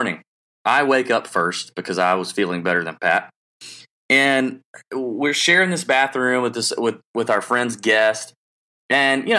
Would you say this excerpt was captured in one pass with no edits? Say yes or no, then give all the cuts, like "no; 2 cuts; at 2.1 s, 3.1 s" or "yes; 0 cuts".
yes; 0 cuts